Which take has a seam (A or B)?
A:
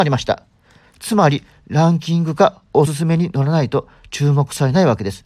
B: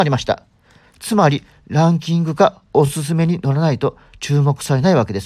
A